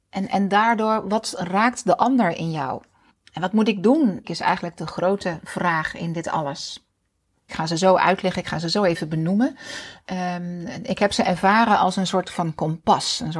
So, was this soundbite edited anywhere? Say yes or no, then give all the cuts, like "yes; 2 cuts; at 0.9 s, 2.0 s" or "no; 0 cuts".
yes; 2 cuts; at 4.2 s, 7.5 s